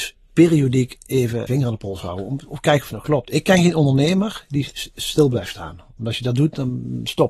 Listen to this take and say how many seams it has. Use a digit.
1